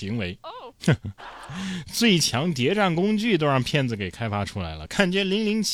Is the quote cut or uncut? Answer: cut